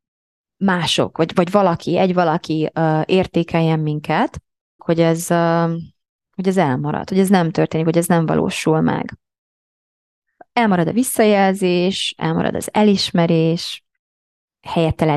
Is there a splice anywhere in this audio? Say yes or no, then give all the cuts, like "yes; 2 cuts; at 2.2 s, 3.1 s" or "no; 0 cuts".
yes; 1 cut; at 4.8 s